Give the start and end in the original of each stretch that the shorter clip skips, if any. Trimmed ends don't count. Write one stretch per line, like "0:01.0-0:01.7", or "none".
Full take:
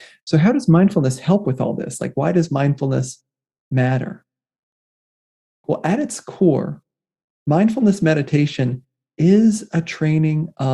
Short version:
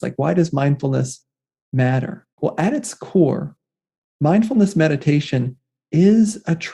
0:04.3-0:05.6